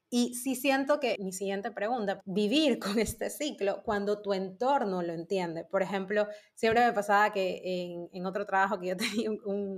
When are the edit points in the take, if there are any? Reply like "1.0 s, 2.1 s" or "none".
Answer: 1.2 s, 2.2 s